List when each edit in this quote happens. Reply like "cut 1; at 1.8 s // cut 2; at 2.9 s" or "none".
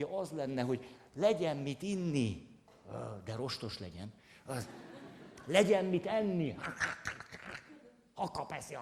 none

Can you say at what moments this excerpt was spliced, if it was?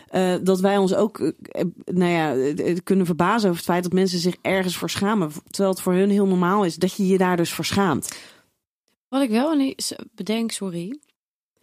none

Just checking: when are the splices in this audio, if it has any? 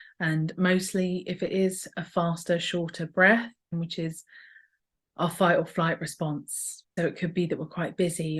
cut 1; at 3.7 s // cut 2; at 7.0 s

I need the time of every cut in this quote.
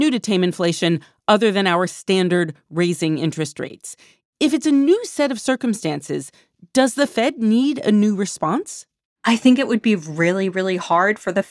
none

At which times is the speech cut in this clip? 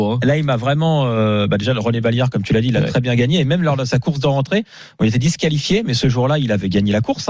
none

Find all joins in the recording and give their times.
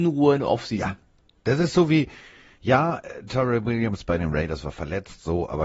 none

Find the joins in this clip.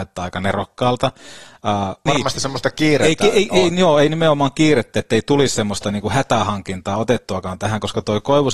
cut 1; at 2.1 s

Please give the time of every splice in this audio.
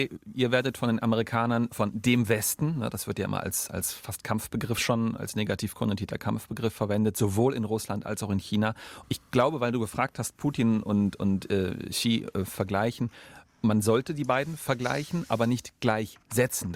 cut 1; at 9.0 s

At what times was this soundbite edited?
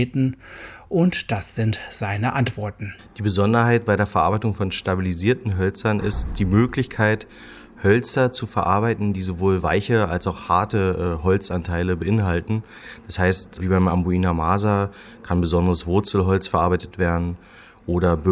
cut 1; at 13.6 s

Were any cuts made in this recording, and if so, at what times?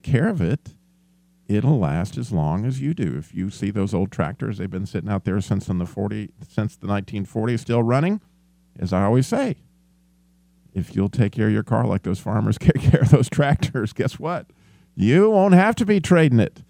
none

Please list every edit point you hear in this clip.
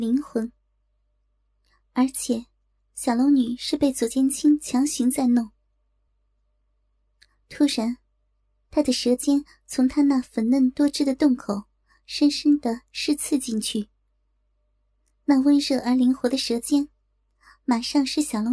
none

